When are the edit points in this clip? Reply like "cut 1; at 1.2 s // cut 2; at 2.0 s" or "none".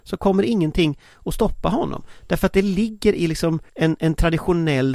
cut 1; at 3.7 s